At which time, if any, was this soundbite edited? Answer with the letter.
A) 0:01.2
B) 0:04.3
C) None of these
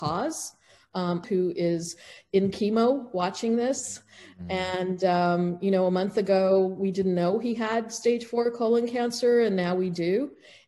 A